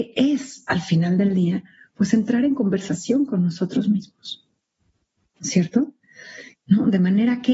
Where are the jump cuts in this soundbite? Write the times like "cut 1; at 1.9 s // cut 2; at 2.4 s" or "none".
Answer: cut 1; at 6.5 s

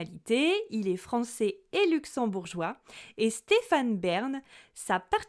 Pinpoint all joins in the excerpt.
none

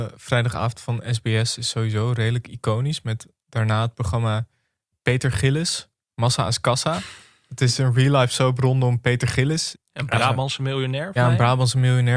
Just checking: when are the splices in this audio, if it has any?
cut 1; at 9.7 s // cut 2; at 11.2 s

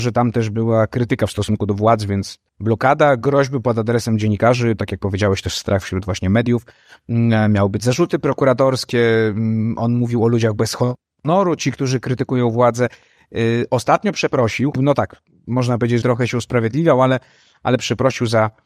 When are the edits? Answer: cut 1; at 2.5 s // cut 2; at 14.7 s // cut 3; at 16.0 s

